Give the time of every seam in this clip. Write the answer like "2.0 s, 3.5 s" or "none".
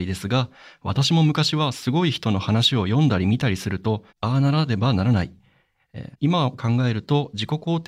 4.1 s, 6.1 s